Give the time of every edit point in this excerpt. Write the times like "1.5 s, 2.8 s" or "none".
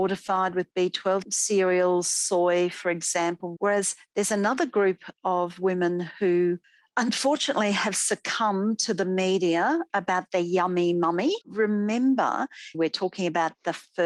3.6 s, 11.4 s, 12.7 s